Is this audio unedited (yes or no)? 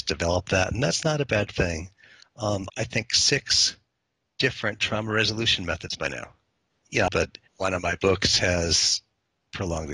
no